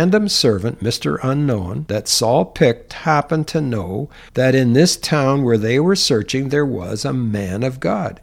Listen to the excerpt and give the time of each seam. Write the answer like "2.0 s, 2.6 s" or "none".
2.9 s